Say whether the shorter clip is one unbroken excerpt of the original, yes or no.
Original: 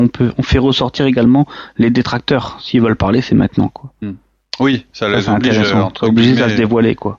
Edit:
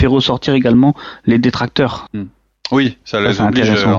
no